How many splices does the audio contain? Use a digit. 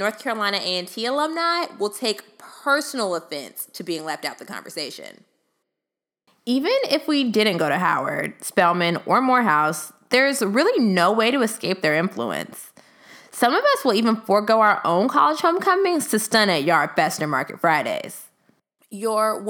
0